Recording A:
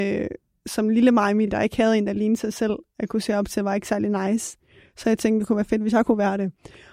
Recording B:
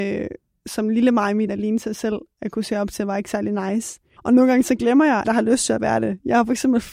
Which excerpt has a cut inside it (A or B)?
B